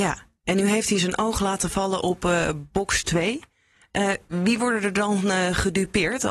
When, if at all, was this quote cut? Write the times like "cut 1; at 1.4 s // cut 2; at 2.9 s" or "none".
none